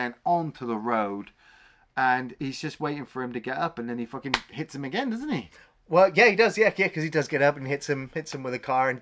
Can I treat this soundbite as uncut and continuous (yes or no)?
yes